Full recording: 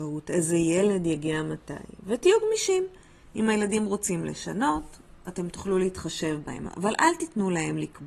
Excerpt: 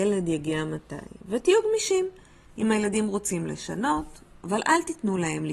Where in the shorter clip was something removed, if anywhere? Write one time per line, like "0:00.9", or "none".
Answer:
0:04.4

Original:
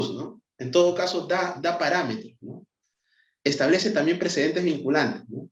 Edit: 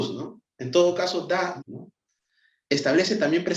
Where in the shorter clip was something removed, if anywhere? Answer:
0:01.6

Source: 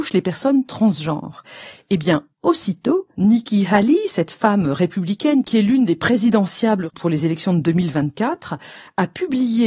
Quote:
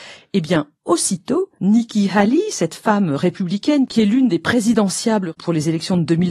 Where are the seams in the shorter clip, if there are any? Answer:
none

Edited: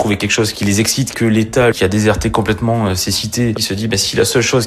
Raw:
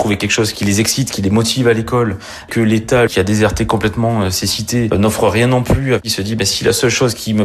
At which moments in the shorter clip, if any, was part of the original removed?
0:01.1
0:03.5

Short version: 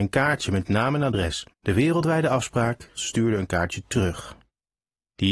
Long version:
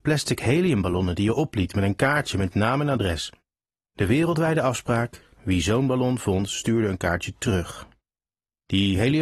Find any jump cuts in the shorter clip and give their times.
0:01.5
0:03.0

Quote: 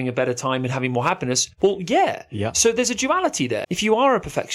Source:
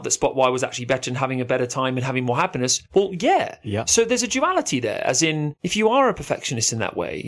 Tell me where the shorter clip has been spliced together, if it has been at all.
0:03.6

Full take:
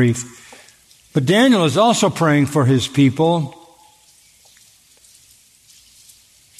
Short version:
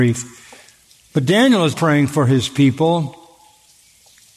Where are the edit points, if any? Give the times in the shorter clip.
0:01.7

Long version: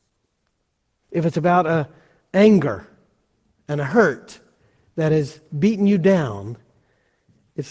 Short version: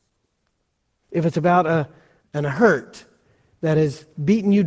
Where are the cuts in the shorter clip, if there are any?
0:02.2

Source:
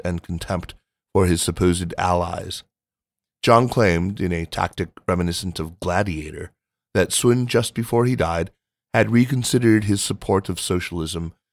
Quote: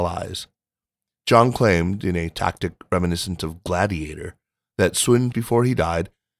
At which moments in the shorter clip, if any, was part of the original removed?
0:05.3

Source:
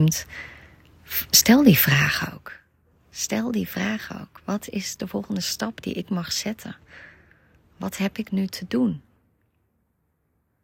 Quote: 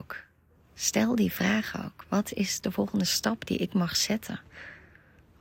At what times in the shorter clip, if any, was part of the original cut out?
none

